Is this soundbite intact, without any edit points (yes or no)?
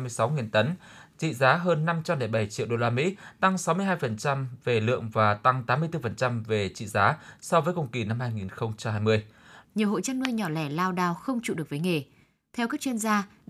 no